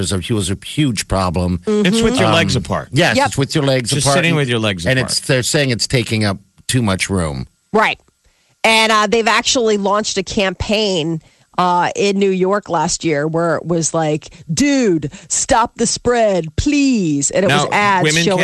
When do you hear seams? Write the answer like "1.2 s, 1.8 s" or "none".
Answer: none